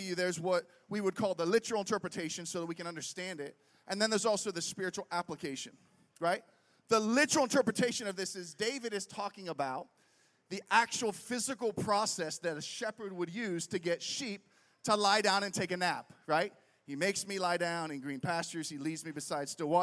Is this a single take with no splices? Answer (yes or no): yes